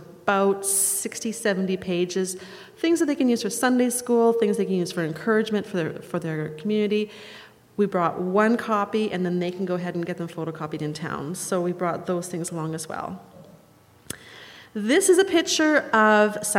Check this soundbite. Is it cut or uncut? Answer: uncut